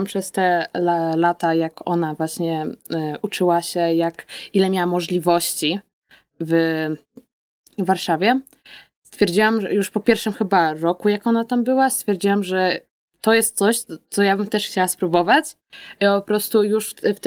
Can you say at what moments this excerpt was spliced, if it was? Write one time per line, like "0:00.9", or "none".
none